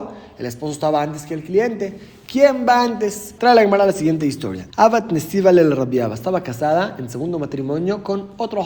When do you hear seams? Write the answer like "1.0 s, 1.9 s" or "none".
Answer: 3.4 s, 4.7 s

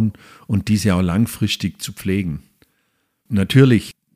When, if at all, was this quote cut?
none

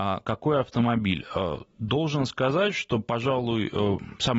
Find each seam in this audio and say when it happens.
none

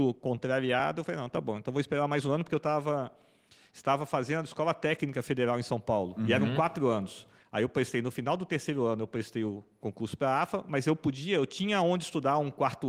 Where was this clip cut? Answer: none

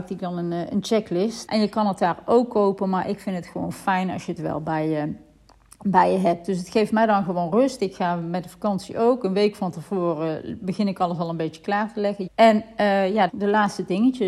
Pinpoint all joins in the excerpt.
1.5 s, 12.3 s, 13.3 s

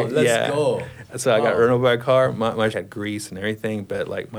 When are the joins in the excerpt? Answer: 2.7 s

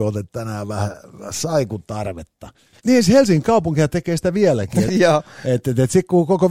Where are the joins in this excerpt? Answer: 2.8 s, 4.9 s

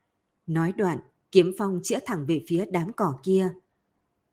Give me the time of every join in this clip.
1.2 s

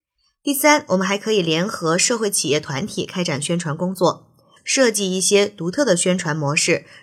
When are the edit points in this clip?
4.6 s

